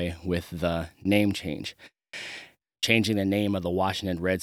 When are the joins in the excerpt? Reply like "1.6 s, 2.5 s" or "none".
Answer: 2.6 s

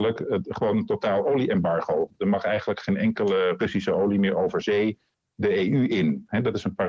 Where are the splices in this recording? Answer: none

